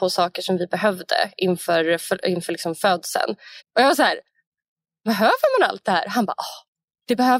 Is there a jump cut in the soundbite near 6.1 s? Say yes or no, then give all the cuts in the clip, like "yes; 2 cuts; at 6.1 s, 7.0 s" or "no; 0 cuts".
no; 1 cut; at 3.6 s